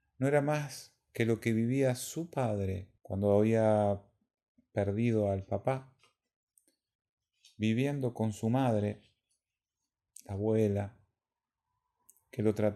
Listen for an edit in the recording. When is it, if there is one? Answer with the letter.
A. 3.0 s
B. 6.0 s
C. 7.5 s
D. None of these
A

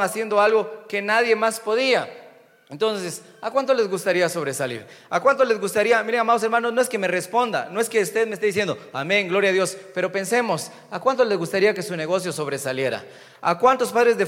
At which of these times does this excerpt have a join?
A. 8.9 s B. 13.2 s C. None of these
C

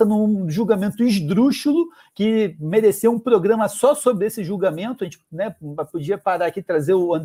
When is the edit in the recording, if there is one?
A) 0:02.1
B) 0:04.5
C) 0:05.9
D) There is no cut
D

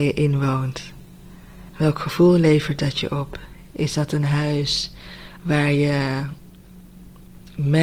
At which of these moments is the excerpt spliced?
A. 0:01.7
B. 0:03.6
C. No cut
A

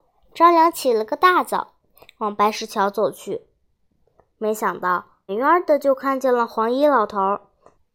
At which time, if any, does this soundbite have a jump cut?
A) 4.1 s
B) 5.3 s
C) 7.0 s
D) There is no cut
B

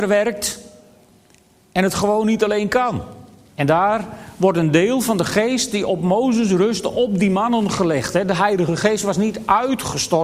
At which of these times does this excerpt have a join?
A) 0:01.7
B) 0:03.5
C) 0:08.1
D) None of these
B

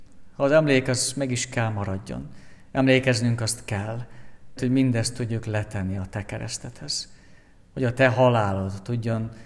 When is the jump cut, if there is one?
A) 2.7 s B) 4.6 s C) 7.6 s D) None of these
B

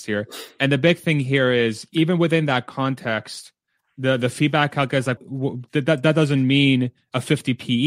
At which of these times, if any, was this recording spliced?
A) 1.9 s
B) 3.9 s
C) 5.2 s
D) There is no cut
C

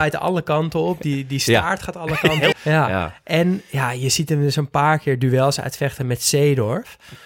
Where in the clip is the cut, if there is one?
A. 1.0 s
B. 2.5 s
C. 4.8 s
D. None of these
B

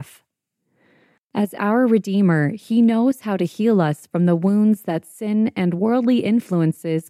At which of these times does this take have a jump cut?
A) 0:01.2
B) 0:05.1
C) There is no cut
A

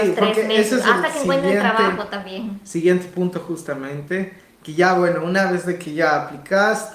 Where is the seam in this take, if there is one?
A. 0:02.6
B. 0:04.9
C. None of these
C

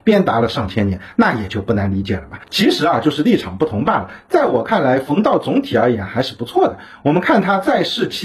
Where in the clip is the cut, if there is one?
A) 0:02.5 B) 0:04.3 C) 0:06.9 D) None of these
D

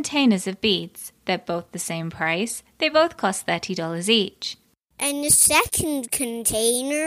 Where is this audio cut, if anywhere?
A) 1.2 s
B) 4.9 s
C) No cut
B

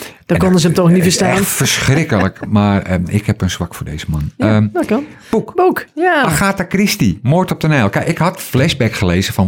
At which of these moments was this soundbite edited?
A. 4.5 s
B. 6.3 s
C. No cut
C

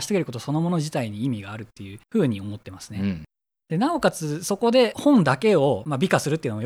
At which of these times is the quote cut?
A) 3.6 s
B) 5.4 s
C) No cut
A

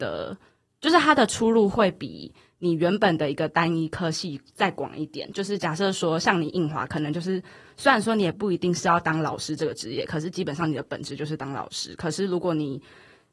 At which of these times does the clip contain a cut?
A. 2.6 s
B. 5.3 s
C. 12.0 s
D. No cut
D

